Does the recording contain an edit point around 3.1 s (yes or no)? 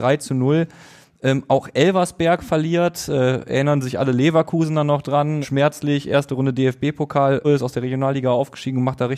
no